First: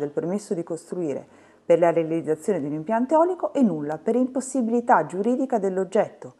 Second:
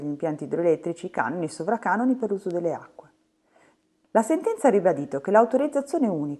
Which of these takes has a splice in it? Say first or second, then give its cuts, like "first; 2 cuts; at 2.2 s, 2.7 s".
second; 1 cut; at 4.0 s